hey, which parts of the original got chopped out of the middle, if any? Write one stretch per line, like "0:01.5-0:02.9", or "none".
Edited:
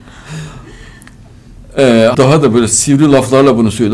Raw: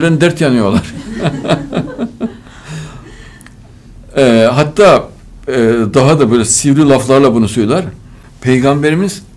0:04.5-0:05.9

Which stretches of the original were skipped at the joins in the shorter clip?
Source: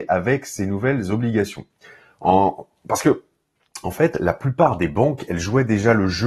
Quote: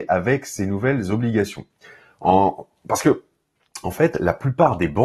none

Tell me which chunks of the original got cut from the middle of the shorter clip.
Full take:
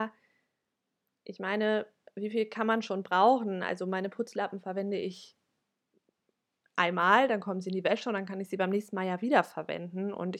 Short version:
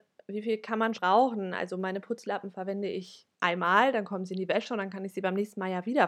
0:02.8-0:03.0
0:05.4-0:06.7

